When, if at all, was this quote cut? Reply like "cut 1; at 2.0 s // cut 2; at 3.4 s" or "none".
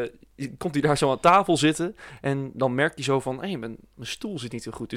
none